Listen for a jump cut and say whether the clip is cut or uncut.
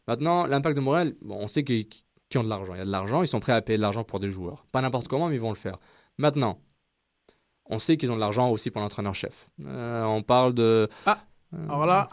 cut